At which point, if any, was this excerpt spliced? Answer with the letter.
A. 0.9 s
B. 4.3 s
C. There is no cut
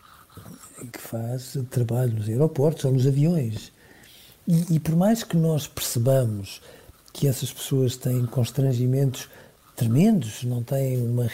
A